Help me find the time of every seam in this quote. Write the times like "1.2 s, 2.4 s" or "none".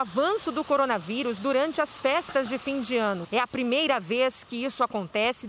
3.2 s